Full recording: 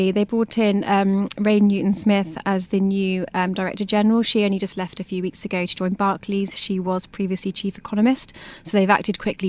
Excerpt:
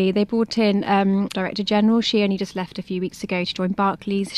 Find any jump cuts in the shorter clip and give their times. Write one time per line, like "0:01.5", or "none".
0:01.3